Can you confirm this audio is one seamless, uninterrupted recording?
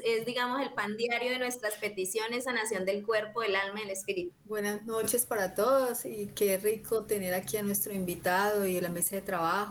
no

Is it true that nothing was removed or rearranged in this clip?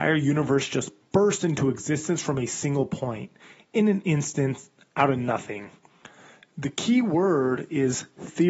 yes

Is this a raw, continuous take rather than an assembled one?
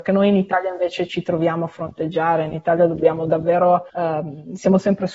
yes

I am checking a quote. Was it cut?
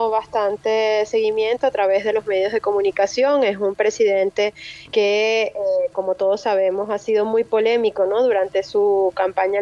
no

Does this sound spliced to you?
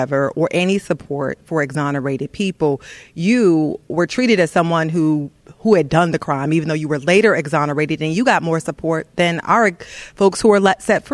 no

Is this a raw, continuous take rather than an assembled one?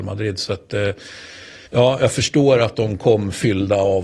no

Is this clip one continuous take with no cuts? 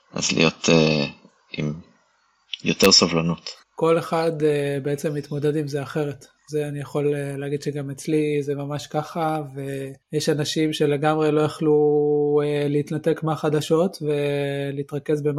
no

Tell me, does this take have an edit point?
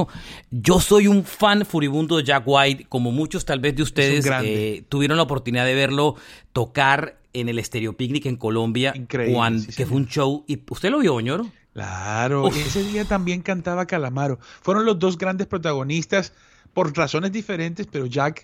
no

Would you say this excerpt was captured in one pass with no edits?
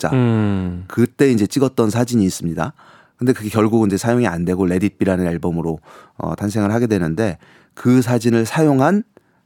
yes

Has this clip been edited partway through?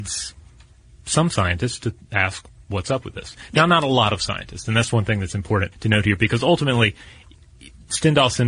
yes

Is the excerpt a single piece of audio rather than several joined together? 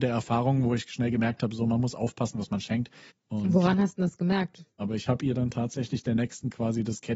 no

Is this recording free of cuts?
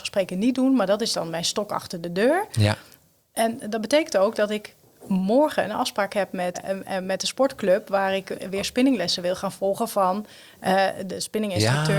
no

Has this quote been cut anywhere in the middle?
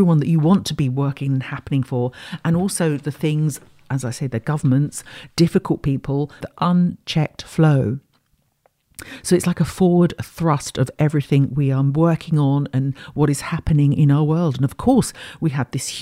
yes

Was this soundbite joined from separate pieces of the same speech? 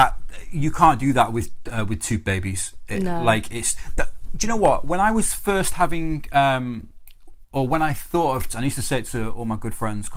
yes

